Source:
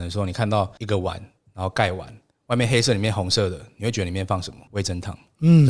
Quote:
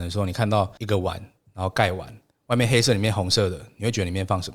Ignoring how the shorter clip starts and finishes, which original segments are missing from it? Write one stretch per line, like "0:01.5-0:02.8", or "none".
none